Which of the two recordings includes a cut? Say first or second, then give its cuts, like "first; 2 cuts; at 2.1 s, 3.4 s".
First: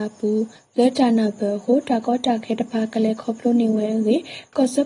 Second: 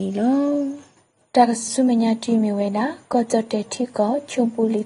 second; 1 cut; at 1.7 s